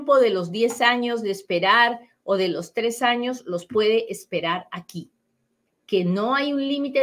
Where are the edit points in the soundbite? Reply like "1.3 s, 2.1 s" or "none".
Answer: 5.7 s